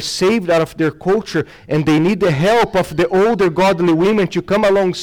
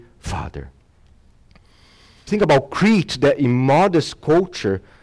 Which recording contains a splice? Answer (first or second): second